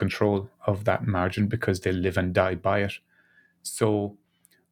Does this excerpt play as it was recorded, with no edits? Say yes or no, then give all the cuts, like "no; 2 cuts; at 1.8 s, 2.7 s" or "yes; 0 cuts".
yes; 0 cuts